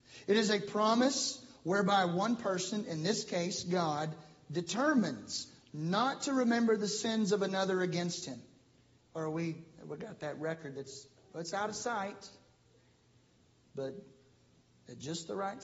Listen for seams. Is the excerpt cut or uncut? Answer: cut